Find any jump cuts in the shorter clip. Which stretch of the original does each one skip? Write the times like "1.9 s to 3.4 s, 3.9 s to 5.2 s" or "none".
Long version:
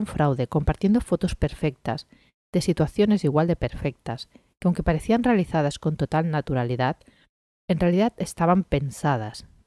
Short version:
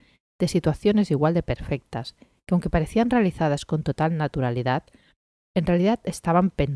none